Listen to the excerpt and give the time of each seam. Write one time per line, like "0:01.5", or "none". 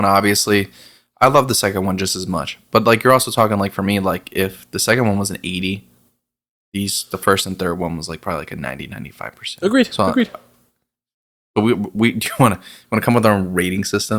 none